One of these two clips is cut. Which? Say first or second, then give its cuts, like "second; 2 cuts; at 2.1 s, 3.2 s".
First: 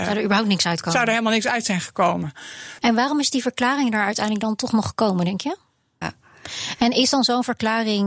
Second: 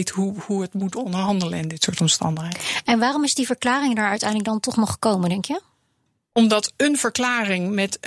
first; 2 cuts; at 2.8 s, 6.0 s